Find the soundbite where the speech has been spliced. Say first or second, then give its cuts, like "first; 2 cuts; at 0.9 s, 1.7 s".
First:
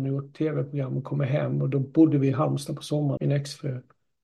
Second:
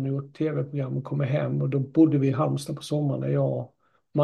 first; 1 cut; at 3.2 s